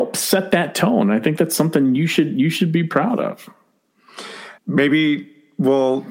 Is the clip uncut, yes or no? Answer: no